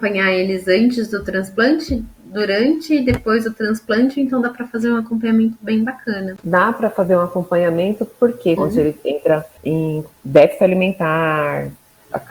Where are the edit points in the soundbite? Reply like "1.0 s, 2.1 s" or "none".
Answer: 8.6 s